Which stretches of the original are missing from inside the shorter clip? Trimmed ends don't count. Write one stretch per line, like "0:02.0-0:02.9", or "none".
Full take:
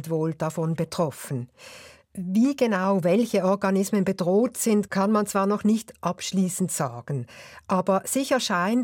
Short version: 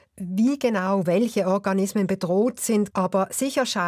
0:04.9-0:07.7